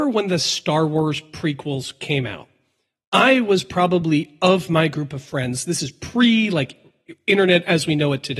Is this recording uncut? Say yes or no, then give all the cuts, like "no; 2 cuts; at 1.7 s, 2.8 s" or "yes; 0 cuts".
yes; 0 cuts